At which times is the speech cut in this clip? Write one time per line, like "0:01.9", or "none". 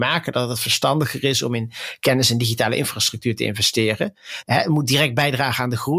0:04.4